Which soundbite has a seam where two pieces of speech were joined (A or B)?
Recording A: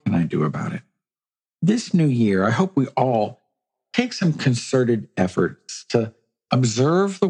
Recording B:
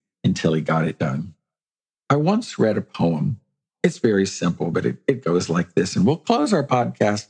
B